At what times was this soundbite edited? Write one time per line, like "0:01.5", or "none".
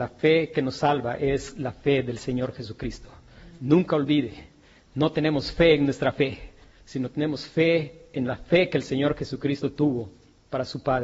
none